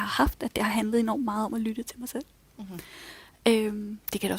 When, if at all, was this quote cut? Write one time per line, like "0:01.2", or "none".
none